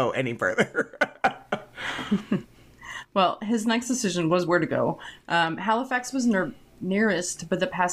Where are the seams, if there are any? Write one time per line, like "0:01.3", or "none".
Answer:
none